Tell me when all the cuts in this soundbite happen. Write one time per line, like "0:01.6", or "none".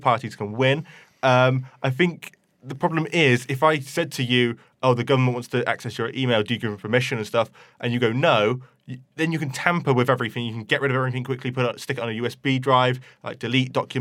none

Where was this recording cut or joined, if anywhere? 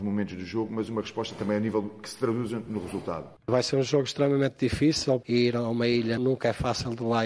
0:03.4
0:05.2

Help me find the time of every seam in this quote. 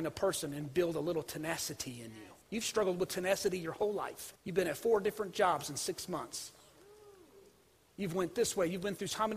0:02.4
0:04.4

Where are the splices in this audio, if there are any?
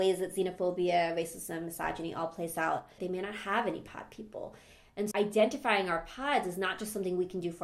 0:03.0
0:05.1

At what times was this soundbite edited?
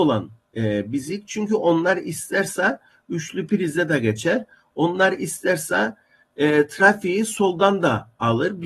none

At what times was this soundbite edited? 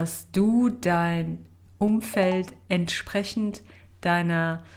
none

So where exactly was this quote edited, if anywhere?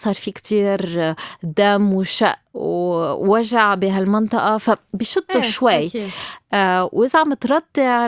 none

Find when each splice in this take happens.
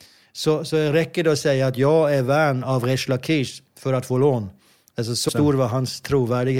0:05.3

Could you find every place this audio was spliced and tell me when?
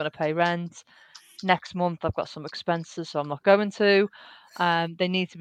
none

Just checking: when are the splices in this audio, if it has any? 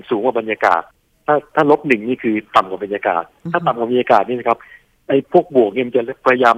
none

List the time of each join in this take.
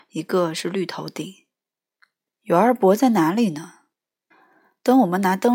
0:02.3

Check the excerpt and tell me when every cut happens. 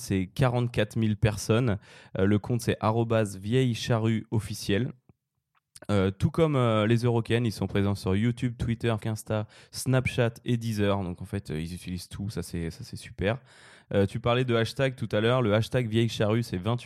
0:09.0

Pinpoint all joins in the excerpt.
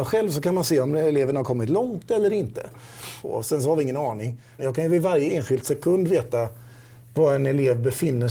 0:03.2
0:04.6

